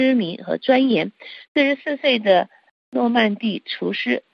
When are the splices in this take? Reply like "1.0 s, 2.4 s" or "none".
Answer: 1.4 s